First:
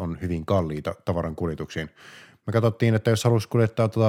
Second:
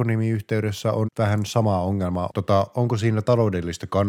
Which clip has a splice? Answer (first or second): second